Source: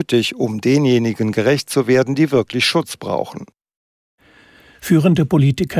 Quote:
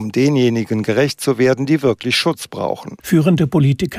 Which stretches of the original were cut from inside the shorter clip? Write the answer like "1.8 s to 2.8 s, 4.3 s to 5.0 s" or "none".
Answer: 3.5 s to 4.8 s